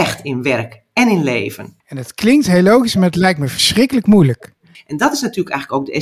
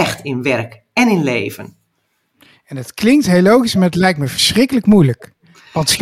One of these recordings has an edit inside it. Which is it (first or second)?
first